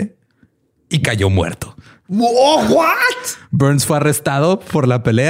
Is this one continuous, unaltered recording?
yes; 0 cuts

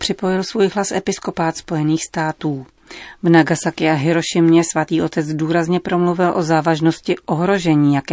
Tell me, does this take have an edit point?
no; 0 cuts

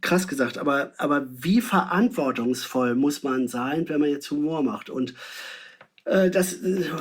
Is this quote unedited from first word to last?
yes; 0 cuts

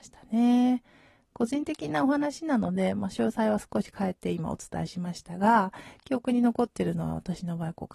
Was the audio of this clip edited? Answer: no; 0 cuts

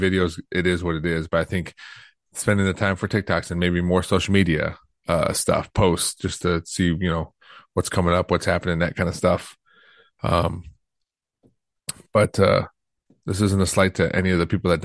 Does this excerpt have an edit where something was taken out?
no; 0 cuts

